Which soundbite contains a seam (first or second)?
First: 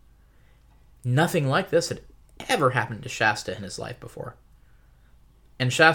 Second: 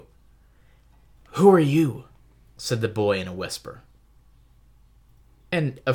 second